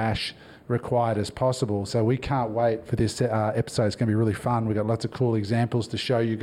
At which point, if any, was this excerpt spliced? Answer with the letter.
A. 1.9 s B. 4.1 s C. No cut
A